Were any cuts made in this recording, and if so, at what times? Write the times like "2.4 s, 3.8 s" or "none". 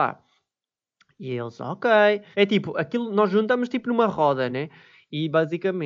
2.3 s, 4.5 s